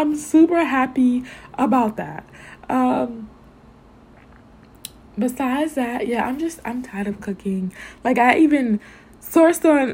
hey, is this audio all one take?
yes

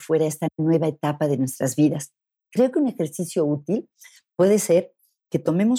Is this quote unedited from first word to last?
no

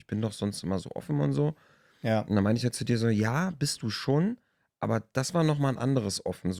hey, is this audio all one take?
yes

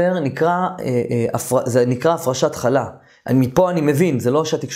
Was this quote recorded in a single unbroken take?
yes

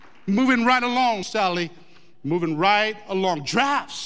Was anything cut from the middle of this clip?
yes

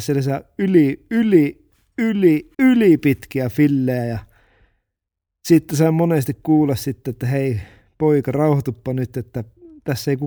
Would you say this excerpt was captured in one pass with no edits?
no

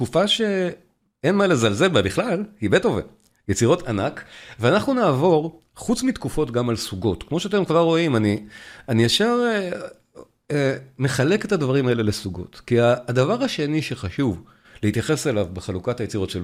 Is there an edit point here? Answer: no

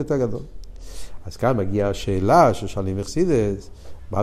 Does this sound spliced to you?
no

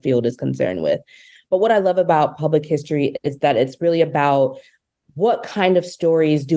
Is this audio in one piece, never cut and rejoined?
yes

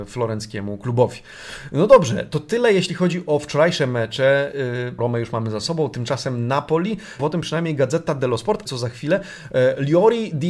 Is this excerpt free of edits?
no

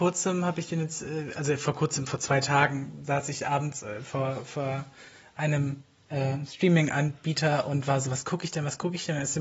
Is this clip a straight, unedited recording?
yes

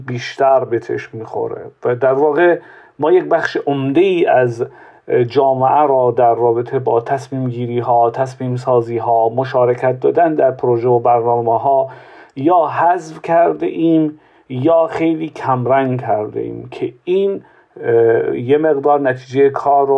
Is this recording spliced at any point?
no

